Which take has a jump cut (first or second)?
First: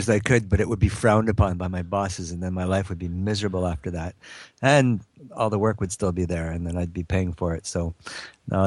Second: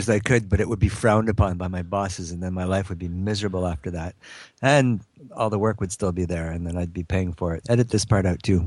second